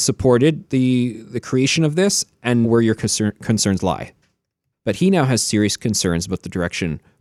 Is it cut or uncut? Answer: cut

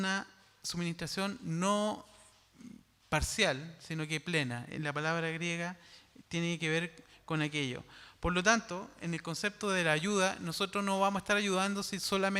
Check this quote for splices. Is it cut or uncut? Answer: uncut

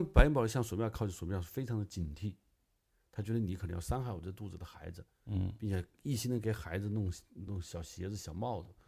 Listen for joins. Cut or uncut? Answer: cut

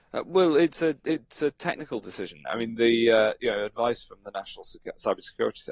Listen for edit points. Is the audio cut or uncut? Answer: uncut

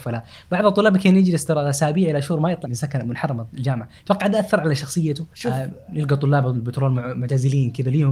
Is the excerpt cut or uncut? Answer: cut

